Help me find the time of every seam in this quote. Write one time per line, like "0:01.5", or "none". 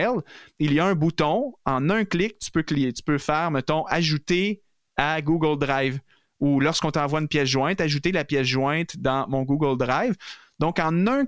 none